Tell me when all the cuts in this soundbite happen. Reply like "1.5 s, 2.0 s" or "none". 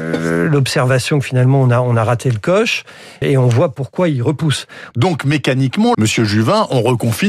3.2 s, 4.9 s, 5.9 s